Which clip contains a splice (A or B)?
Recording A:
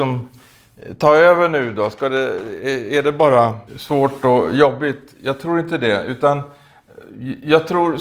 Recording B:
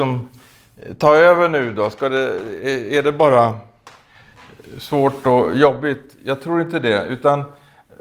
A